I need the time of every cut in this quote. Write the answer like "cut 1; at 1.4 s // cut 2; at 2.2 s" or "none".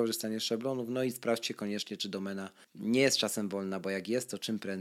none